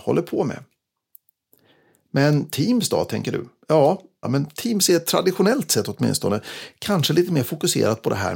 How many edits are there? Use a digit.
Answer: 1